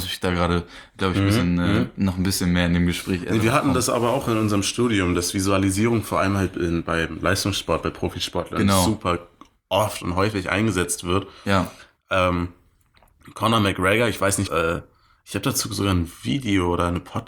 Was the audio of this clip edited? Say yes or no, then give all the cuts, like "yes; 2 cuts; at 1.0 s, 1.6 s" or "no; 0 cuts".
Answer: yes; 1 cut; at 14.5 s